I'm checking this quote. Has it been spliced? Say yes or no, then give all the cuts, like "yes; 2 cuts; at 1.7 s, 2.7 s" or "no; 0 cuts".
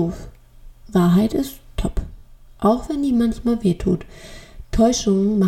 no; 0 cuts